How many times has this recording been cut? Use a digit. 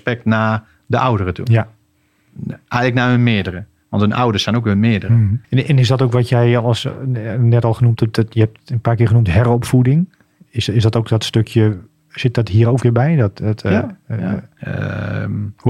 2